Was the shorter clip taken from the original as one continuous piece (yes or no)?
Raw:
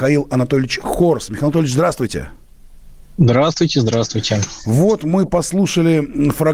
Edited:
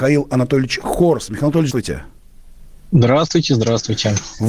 no